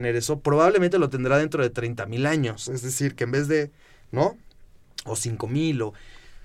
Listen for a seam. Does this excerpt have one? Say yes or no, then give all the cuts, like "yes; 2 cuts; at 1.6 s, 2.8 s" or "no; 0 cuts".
no; 0 cuts